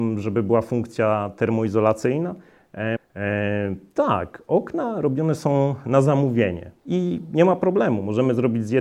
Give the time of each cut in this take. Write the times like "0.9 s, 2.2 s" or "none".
3.0 s, 6.8 s